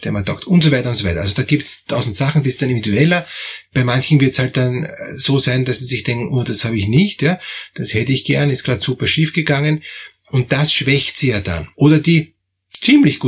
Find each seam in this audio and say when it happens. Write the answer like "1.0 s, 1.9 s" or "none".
11.7 s